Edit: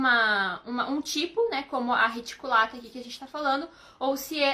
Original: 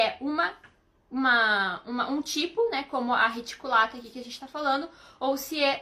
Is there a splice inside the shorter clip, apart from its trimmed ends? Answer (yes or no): no